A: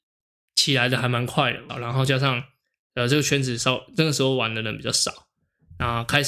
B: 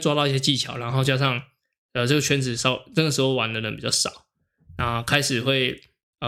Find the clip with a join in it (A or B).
A